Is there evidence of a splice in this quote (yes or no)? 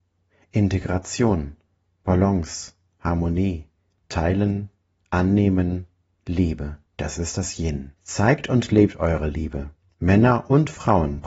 yes